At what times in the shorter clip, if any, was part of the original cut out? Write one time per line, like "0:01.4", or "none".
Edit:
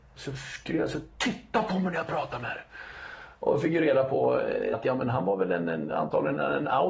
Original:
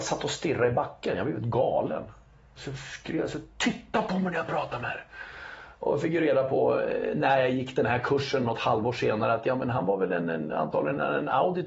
0:04.7